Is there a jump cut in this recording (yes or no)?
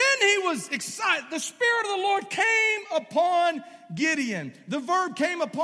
no